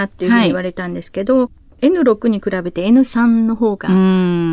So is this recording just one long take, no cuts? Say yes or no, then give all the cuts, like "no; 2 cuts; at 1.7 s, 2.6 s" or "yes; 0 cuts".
yes; 0 cuts